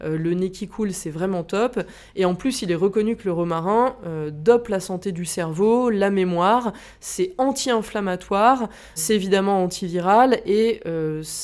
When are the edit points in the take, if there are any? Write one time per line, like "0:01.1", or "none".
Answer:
0:09.0